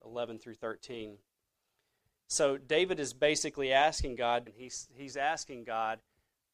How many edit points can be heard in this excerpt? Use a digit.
1